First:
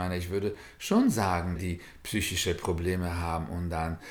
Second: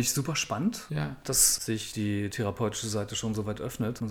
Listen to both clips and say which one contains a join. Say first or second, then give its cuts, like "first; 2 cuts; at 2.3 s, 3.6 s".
first; 1 cut; at 1.5 s